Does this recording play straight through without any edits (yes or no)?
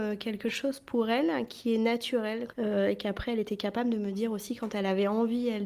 no